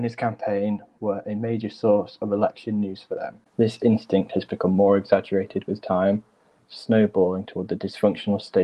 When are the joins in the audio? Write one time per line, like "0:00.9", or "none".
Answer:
0:03.5